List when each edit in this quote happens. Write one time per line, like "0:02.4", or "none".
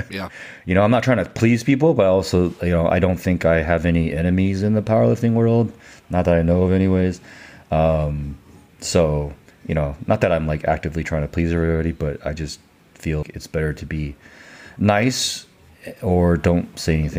0:13.2